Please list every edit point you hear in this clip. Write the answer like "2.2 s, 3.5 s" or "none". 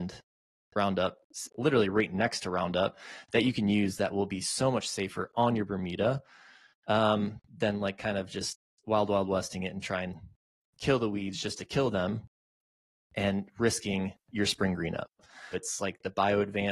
1.5 s, 15.5 s